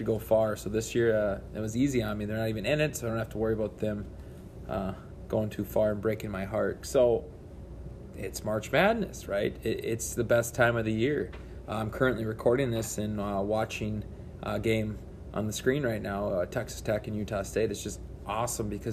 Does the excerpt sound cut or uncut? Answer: cut